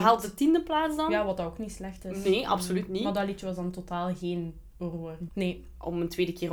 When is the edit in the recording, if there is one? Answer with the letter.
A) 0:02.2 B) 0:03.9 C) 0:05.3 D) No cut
C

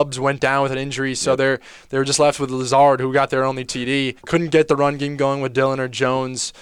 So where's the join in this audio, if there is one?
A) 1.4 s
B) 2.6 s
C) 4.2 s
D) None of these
C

